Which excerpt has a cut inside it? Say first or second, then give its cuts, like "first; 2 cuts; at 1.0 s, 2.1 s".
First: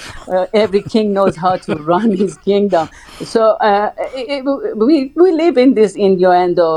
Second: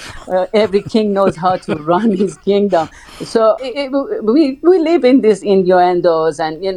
second; 1 cut; at 3.6 s